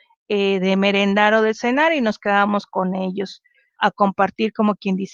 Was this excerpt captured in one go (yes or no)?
no